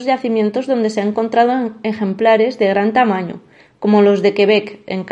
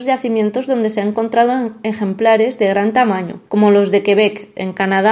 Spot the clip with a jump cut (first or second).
second